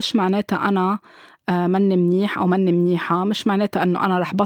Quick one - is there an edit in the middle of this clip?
no; 0 cuts

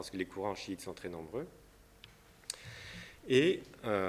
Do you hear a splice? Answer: no; 0 cuts

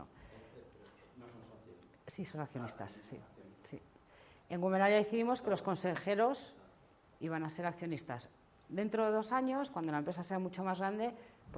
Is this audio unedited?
yes; 0 cuts

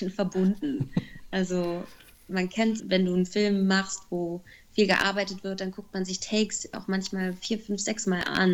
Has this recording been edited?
yes; 1 cut; at 2.8 s

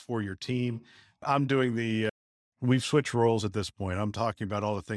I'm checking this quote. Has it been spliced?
no; 0 cuts

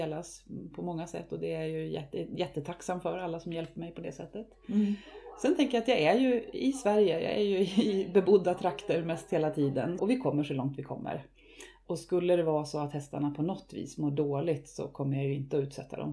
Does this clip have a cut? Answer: yes; 1 cut; at 10.0 s

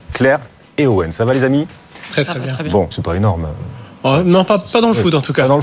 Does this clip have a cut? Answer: yes; 1 cut; at 2.9 s

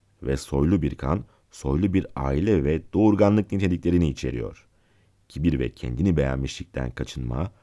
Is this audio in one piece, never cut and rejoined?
yes; 0 cuts

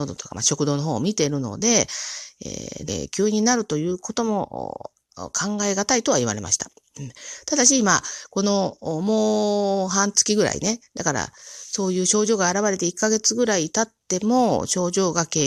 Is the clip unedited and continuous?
no; 1 cut; at 2.9 s

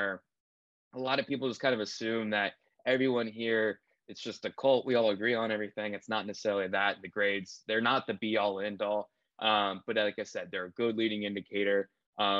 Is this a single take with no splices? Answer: yes; 0 cuts

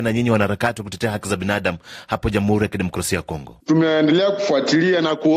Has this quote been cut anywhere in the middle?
no; 0 cuts

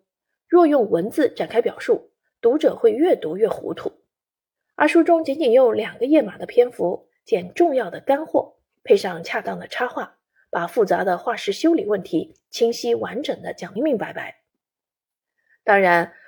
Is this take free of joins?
no; 1 cut; at 13.8 s

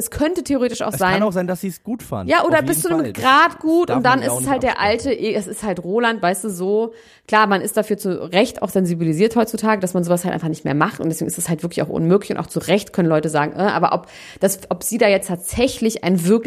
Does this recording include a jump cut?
no; 0 cuts

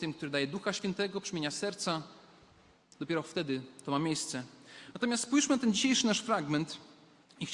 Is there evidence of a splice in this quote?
no; 0 cuts

